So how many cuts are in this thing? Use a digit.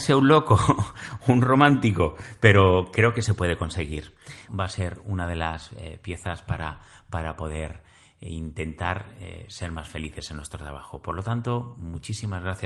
1